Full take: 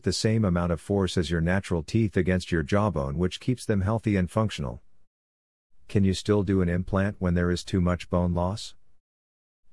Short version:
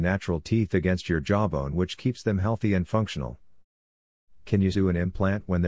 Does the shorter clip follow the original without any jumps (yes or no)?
no